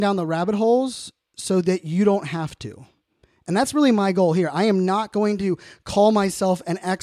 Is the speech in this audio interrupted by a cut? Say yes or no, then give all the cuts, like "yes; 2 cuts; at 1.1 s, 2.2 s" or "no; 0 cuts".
no; 0 cuts